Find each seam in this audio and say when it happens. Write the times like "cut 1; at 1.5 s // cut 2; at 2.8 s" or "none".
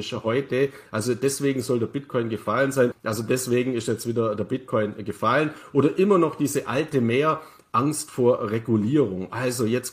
cut 1; at 2.9 s